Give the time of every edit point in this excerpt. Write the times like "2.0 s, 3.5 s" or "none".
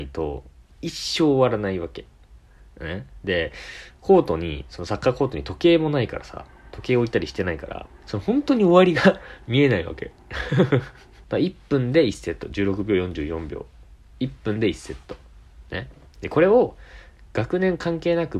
8.0 s, 11.2 s